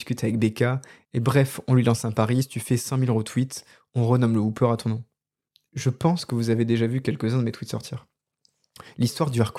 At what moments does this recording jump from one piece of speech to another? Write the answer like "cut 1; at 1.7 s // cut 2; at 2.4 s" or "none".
cut 1; at 5.7 s